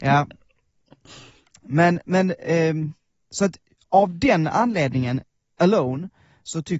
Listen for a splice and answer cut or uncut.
uncut